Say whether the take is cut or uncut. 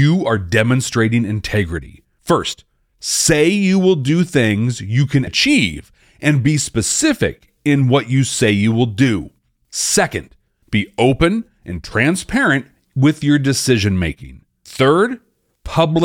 cut